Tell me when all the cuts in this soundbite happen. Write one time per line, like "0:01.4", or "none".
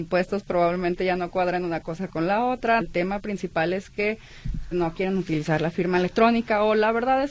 0:02.8
0:04.7